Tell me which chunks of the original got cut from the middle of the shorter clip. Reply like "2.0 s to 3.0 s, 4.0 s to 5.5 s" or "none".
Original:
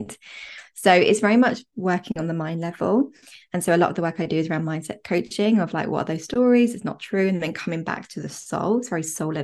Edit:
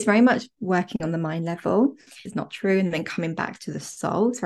3.4 s to 6.7 s

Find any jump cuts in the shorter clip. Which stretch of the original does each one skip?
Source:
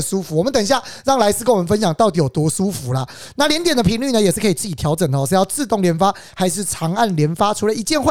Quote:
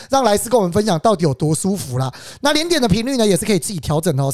none

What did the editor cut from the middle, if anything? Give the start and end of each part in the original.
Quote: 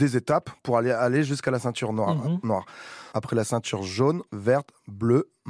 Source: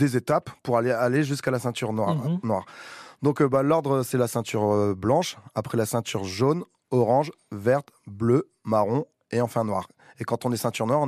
3.1 s to 5.5 s, 6.7 s to 7.5 s

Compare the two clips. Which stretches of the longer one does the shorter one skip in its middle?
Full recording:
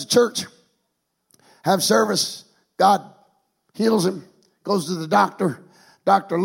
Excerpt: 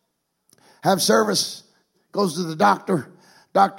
2.8 s to 4.5 s

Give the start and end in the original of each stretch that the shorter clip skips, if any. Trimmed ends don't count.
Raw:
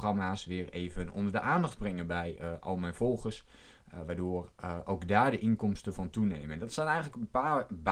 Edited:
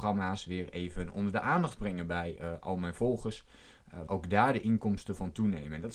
4.1 s to 4.8 s

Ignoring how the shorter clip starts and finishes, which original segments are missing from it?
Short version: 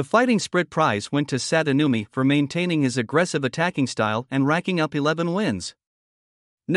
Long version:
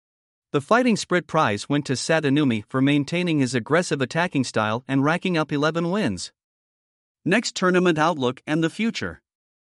none

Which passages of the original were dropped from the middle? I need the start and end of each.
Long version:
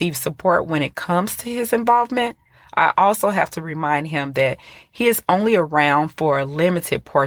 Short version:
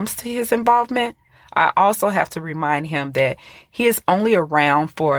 none

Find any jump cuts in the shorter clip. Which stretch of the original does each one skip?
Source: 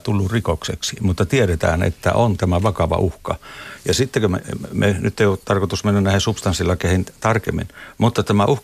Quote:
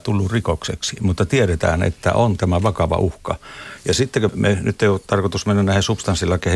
4.3 s to 4.7 s

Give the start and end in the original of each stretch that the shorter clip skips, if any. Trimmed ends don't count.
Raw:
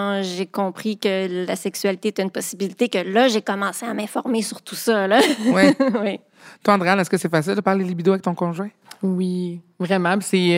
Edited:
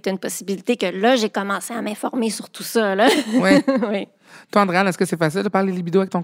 none

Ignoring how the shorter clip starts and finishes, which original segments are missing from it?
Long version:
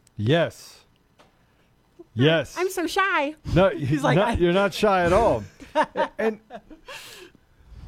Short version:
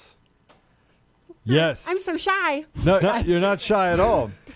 3.7 s to 4.1 s

